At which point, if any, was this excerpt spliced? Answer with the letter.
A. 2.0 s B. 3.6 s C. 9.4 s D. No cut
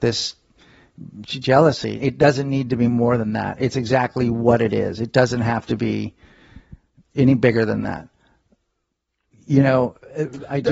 A